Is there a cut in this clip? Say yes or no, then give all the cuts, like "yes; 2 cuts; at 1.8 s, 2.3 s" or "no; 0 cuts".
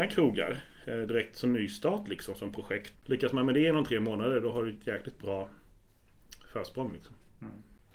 yes; 1 cut; at 3.0 s